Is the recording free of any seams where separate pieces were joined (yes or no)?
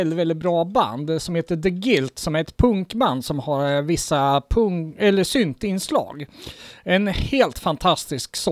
yes